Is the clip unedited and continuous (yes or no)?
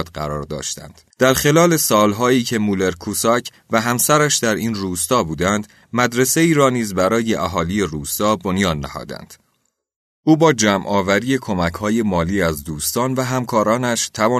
no